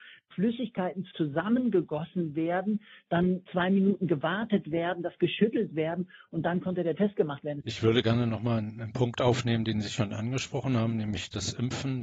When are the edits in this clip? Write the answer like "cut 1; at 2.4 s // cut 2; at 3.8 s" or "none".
cut 1; at 7.6 s